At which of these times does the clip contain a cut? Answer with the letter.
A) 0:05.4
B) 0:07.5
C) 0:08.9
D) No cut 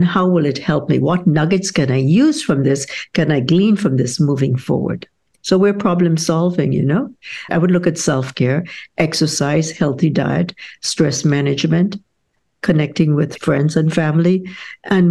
B